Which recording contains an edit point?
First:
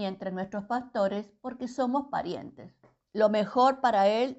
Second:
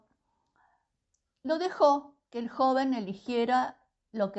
first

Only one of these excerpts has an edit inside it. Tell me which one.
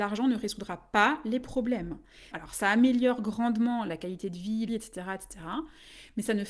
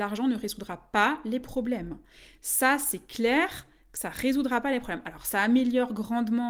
first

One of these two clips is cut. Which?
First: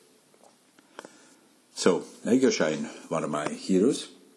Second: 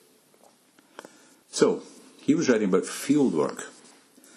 second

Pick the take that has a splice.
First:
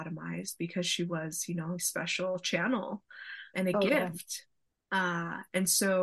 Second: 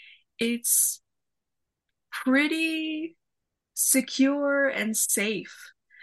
first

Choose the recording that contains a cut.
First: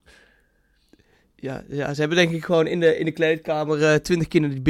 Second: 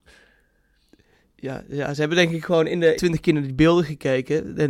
second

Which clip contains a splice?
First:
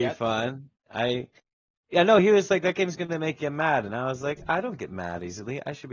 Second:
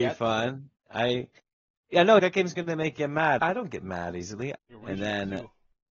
second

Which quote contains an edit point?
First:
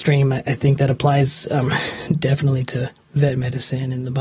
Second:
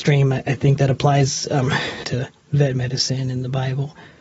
second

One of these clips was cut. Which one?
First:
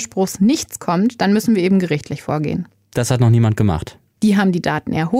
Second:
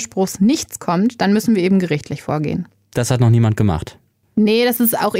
first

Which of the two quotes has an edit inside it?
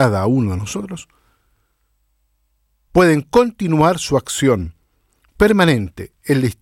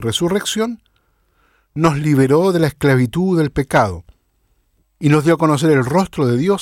second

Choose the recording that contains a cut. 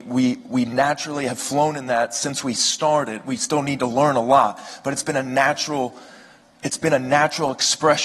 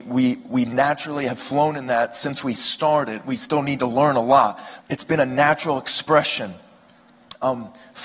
second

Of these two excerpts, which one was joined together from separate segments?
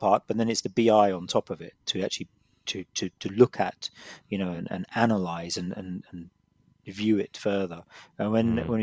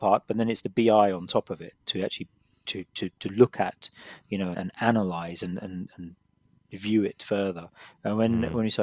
second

